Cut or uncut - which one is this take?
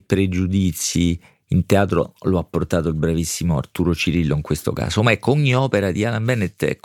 uncut